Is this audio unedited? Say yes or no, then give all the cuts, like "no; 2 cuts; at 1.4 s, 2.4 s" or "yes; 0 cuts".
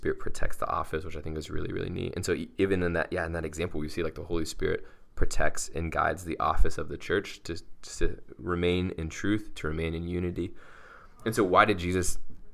yes; 0 cuts